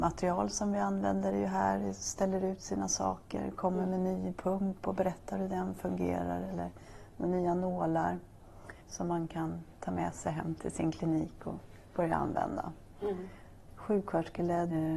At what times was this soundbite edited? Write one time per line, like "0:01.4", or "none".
0:08.8
0:13.7